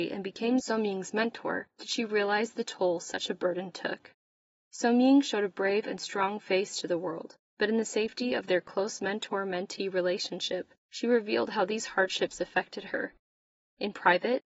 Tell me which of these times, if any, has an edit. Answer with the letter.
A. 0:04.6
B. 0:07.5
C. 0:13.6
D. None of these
D